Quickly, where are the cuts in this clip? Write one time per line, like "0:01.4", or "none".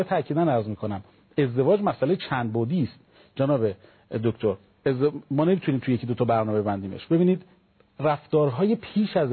none